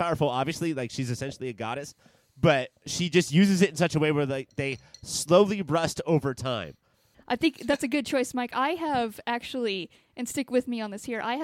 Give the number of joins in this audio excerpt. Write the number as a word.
one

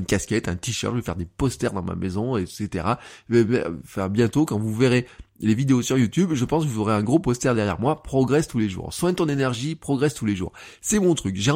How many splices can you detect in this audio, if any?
zero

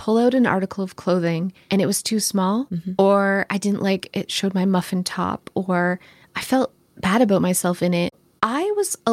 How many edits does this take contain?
zero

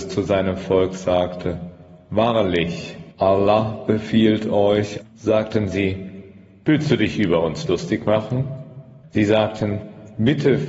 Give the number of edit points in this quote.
three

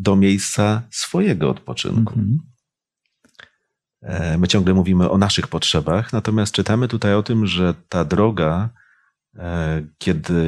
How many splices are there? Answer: zero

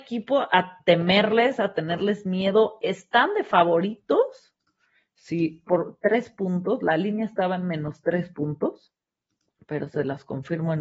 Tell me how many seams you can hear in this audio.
one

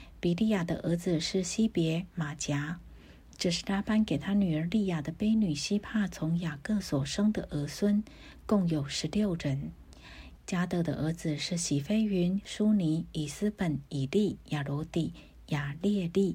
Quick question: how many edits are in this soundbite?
two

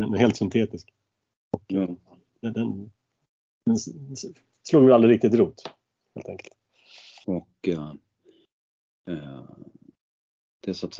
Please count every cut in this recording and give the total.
one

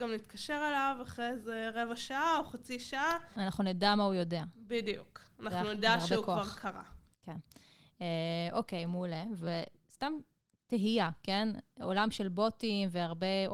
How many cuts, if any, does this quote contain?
zero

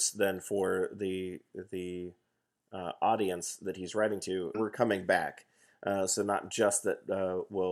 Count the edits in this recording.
one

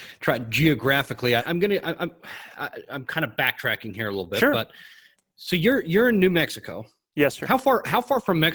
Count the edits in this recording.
one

